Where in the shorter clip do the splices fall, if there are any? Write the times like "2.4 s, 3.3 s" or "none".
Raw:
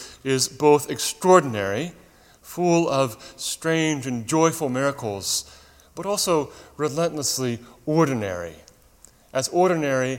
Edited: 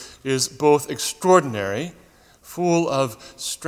none